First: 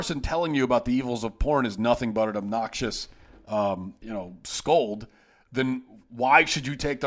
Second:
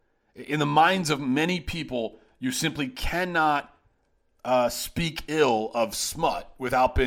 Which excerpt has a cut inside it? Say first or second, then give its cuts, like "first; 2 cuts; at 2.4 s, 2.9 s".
first; 1 cut; at 4.0 s